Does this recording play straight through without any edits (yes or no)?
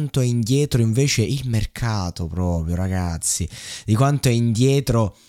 yes